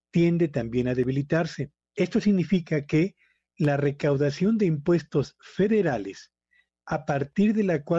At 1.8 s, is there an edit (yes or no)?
yes